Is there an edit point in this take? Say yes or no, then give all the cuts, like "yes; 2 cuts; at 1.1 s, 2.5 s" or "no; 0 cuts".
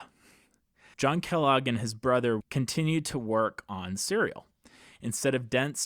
yes; 2 cuts; at 0.9 s, 2.4 s